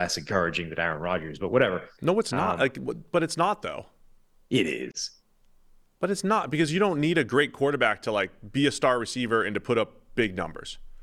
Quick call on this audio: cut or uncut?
uncut